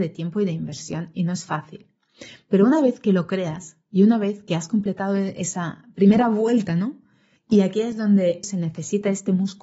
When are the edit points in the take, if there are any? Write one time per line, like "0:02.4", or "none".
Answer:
0:07.4
0:08.4